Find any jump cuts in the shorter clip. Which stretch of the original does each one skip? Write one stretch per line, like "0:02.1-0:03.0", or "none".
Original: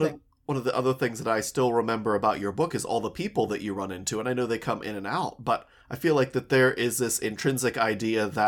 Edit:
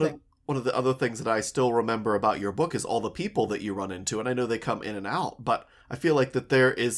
none